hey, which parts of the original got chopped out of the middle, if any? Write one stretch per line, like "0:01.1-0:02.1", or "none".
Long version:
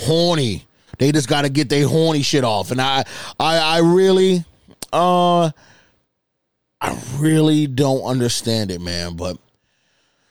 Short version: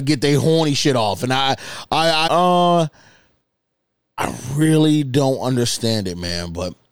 0:03.7-0:04.9